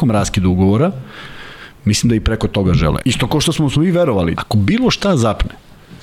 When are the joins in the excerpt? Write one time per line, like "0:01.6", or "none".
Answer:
0:03.0
0:04.3